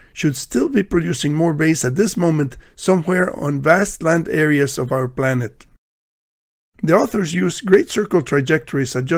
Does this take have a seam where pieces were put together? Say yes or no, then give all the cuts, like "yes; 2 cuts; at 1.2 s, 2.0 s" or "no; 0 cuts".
yes; 1 cut; at 6.7 s